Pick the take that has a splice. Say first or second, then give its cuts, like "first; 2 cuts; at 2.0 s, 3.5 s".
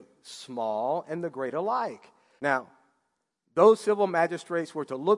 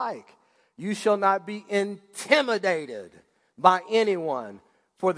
first; 1 cut; at 2.4 s